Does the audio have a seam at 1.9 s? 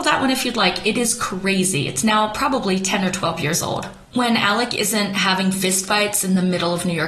no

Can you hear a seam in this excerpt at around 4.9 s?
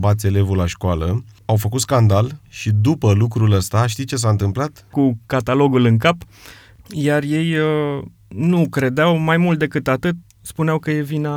yes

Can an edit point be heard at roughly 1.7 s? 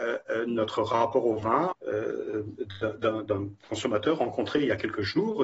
yes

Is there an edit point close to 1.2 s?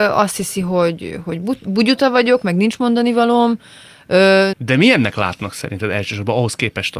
no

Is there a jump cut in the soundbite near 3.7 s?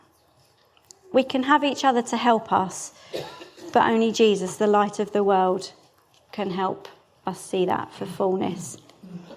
no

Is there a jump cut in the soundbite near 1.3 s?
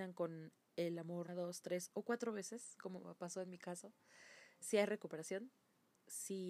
yes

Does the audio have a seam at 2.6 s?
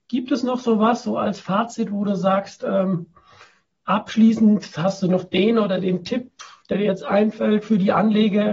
no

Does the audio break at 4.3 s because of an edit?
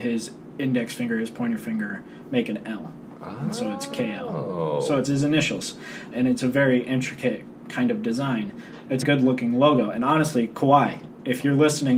no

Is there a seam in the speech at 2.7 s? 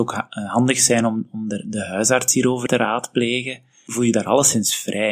yes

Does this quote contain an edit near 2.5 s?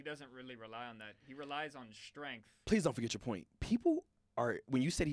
no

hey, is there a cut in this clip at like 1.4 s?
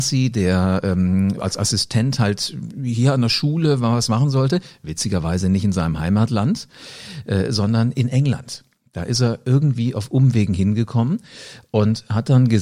yes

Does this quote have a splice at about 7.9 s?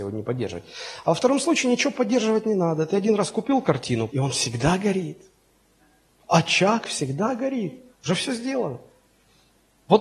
yes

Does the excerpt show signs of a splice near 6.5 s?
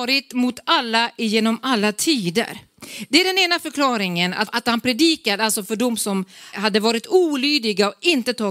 yes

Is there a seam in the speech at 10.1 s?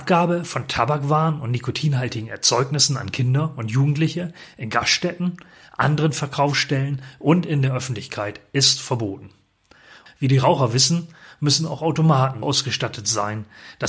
yes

